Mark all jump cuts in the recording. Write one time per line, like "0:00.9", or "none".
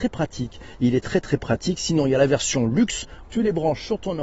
0:03.2

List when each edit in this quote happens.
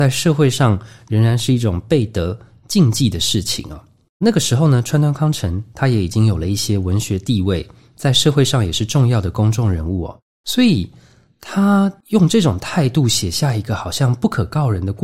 none

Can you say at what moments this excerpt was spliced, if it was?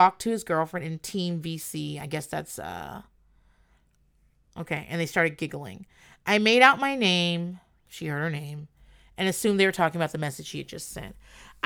none

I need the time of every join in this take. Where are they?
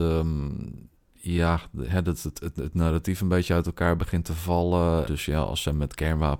0:02.3
0:05.1

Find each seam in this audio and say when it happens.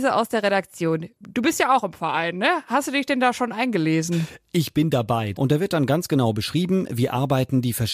0:05.3

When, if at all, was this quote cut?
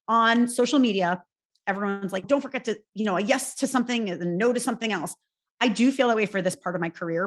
0:02.2

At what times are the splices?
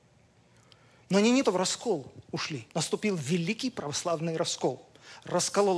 0:01.4
0:02.7

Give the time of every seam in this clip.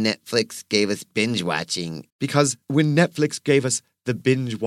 0:02.1

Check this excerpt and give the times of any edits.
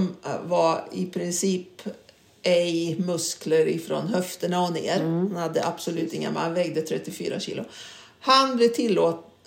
none

